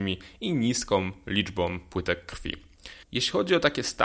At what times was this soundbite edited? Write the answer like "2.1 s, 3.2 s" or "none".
3.0 s